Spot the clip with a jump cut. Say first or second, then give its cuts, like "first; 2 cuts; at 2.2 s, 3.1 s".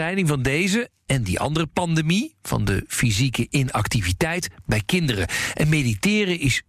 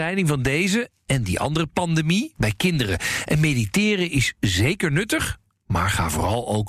second; 1 cut; at 2.4 s